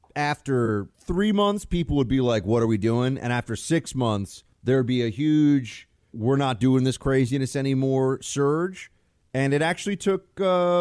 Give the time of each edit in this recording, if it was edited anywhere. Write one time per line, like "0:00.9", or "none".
0:00.9
0:04.5
0:06.1

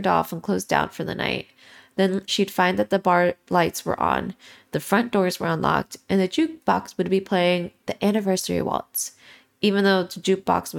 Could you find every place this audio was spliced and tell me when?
0:02.3

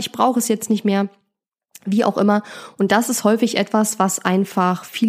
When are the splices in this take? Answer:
none

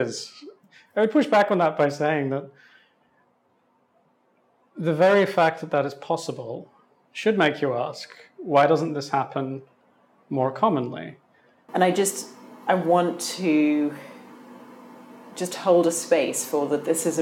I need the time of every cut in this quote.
0:11.7

